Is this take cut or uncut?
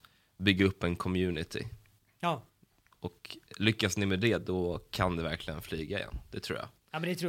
uncut